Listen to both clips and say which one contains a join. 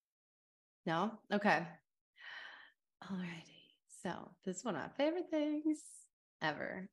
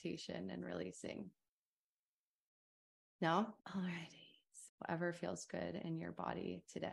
second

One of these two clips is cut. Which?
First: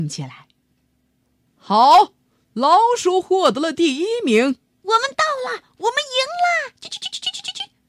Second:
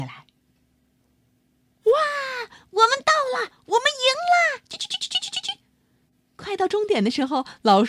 first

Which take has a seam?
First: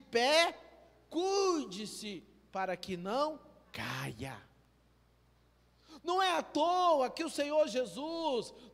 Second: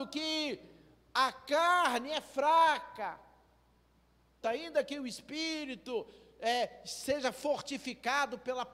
second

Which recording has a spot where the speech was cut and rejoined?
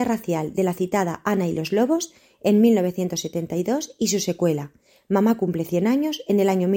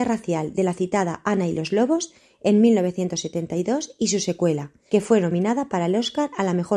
second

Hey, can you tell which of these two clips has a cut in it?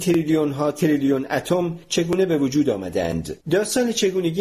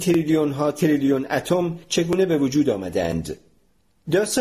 first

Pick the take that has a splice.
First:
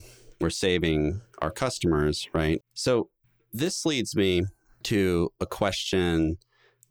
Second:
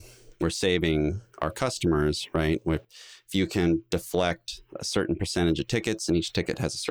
first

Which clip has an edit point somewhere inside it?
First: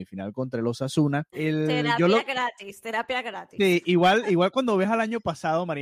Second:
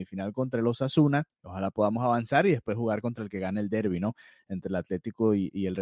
first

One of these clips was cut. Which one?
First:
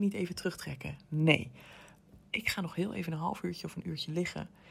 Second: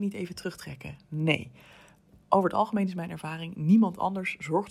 first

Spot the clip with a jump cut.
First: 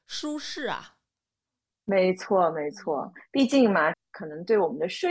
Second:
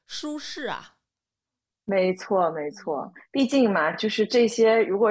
first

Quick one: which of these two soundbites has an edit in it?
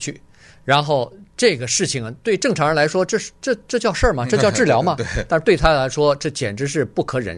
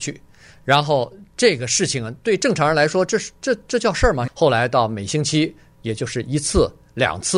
second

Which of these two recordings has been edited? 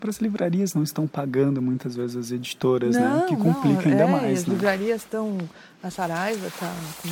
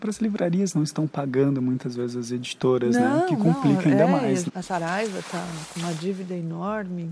second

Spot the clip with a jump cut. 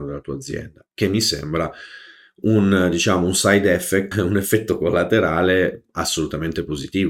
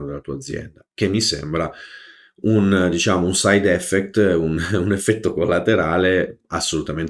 first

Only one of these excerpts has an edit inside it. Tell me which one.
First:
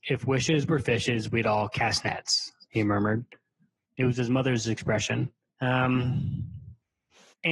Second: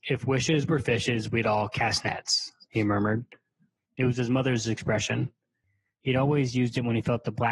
first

